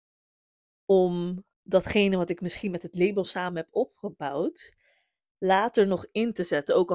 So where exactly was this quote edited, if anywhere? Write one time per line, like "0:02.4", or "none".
0:01.5